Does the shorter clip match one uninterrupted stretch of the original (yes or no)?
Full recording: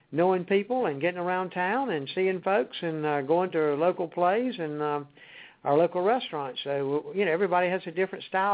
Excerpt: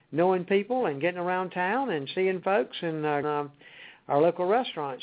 no